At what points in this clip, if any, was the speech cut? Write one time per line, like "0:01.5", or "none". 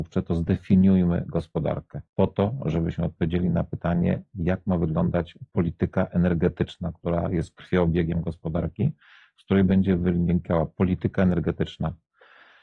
0:02.1